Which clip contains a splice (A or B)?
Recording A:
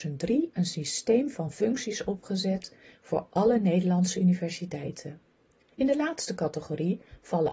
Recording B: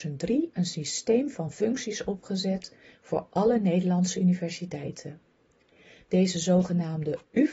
A